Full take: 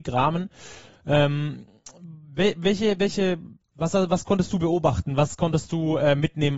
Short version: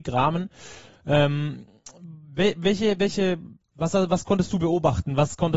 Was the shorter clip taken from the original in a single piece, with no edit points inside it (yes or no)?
yes